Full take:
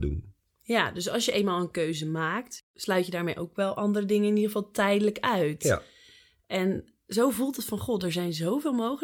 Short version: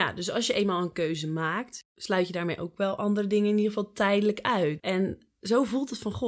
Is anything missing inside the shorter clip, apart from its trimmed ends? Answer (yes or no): yes